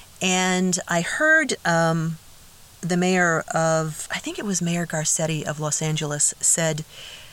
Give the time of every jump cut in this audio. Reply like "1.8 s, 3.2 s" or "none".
4.1 s